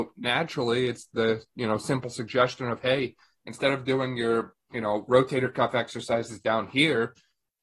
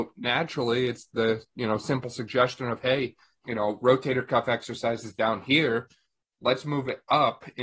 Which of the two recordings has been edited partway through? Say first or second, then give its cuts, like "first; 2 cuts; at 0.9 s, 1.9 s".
second; 1 cut; at 3.4 s